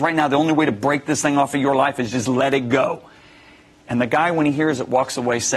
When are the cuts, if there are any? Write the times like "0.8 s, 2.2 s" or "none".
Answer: none